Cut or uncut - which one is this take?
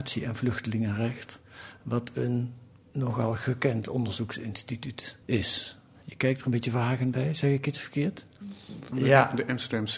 cut